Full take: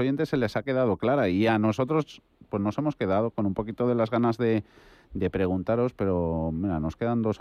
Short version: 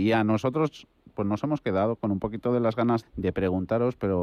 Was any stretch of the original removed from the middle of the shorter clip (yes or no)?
yes